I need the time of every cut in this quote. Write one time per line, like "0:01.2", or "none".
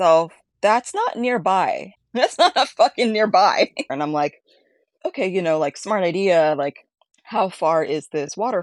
0:03.9